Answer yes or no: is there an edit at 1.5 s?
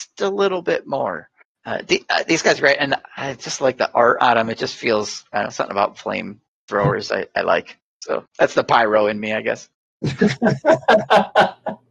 no